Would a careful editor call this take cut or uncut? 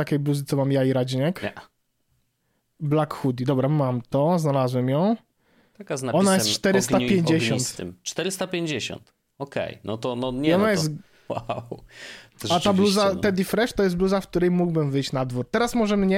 cut